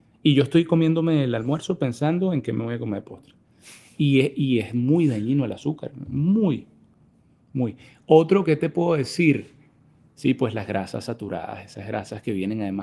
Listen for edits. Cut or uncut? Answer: uncut